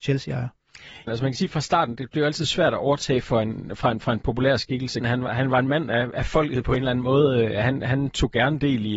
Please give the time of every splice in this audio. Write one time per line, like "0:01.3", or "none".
0:01.1
0:05.0